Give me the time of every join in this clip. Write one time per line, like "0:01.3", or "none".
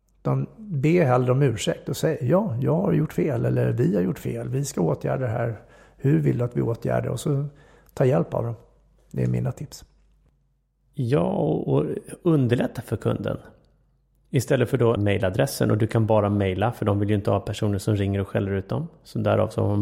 0:15.0